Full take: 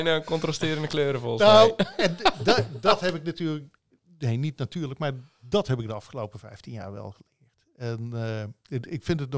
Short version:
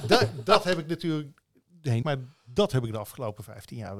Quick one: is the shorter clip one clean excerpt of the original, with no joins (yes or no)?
no